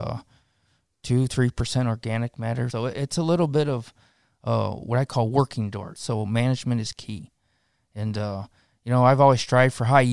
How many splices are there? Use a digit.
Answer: 2